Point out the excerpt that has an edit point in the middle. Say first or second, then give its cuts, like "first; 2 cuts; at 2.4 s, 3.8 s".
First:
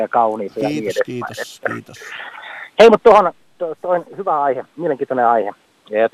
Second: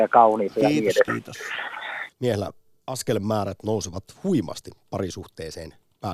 second; 2 cuts; at 1.1 s, 2.1 s